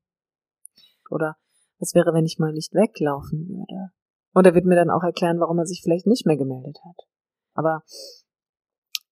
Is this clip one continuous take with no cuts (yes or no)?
no